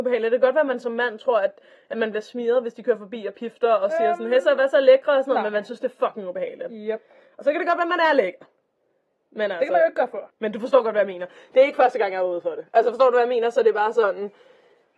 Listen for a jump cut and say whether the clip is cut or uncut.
cut